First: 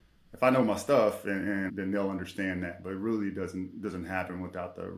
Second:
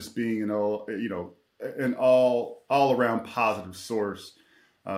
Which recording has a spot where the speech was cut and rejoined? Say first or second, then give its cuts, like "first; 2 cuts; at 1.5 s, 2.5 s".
first; 1 cut; at 1.7 s